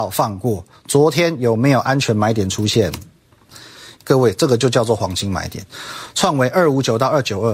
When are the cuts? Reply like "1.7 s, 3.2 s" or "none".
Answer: 4.0 s